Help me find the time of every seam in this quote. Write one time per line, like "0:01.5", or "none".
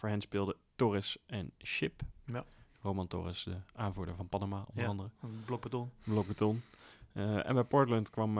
none